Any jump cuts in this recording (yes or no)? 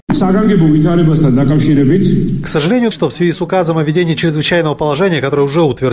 yes